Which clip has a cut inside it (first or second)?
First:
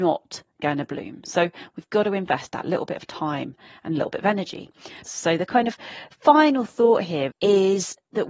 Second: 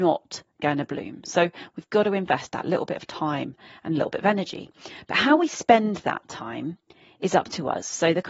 first